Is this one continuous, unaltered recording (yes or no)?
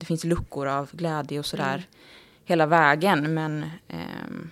yes